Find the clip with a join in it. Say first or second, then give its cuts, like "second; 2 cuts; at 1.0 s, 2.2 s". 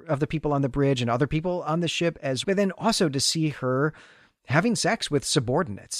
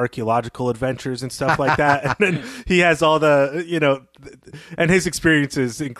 first; 1 cut; at 2.4 s